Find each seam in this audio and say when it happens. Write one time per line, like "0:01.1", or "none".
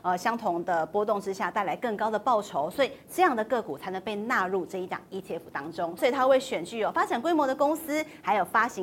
none